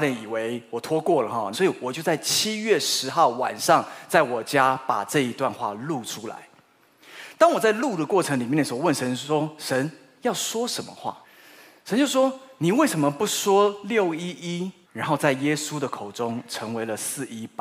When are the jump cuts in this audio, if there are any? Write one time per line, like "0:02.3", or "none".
0:01.5
0:11.2
0:14.8

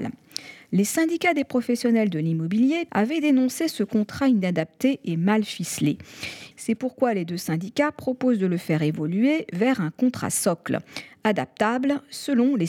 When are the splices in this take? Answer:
0:02.9
0:06.5

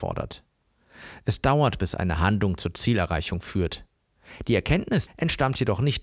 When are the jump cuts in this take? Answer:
0:05.1

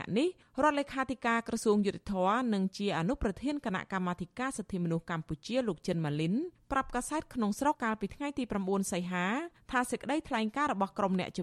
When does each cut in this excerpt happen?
0:07.7

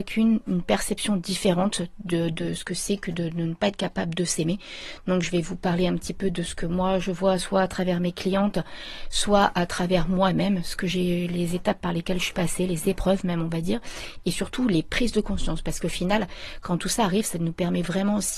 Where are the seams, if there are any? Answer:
none

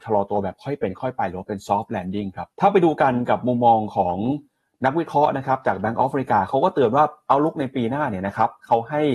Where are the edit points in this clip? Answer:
0:02.5

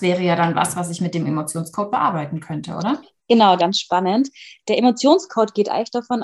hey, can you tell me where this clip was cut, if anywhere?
0:03.6

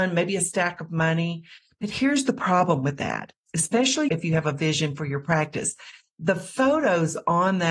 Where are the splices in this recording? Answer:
none

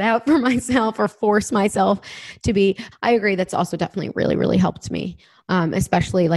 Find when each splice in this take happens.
0:02.9

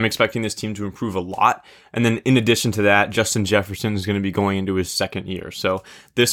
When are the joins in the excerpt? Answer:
none

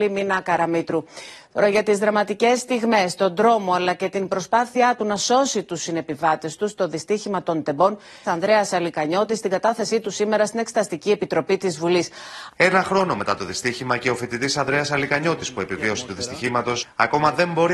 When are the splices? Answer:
0:08.2
0:12.5

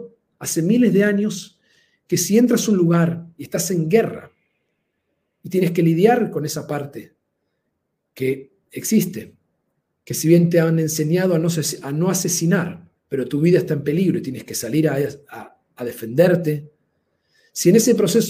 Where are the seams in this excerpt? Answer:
0:13.0

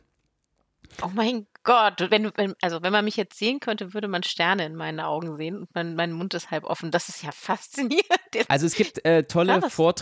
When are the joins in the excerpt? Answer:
none

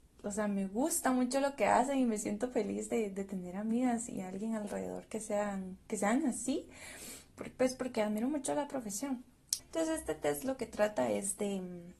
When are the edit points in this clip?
0:09.6

